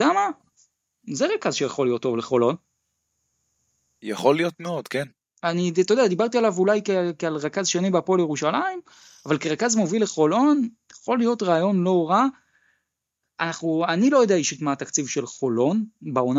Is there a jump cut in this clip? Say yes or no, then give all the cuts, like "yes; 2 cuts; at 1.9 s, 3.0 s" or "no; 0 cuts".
no; 0 cuts